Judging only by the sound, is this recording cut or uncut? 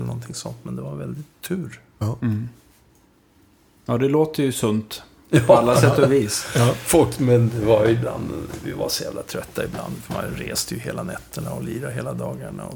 uncut